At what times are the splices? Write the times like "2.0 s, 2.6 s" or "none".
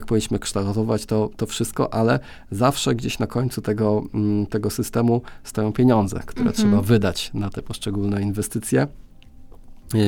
none